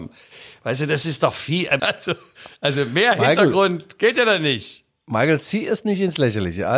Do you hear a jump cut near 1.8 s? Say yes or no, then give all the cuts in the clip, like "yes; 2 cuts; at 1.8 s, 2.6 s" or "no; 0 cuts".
yes; 1 cut; at 1.8 s